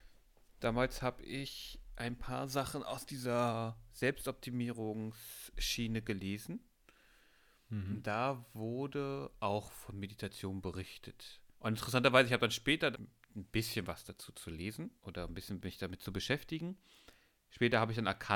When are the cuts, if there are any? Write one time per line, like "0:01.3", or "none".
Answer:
0:11.5
0:12.9
0:15.0